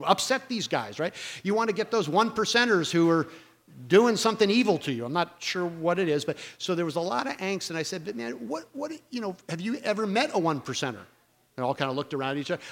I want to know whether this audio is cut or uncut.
uncut